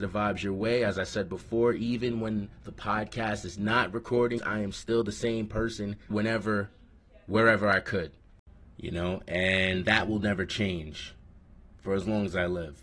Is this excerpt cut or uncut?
cut